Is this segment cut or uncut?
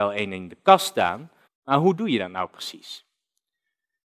cut